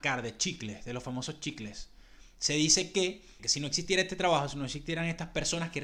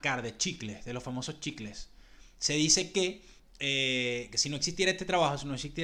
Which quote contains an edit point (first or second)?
first